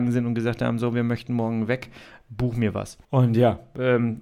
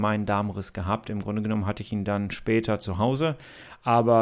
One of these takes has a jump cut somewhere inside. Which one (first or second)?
first